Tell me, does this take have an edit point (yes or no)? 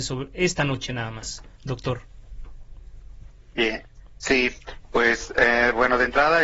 no